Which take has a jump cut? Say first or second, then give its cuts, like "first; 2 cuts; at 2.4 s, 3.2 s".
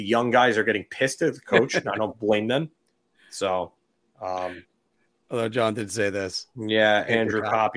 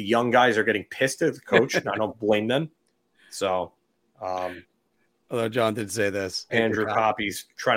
second; 1 cut; at 6.5 s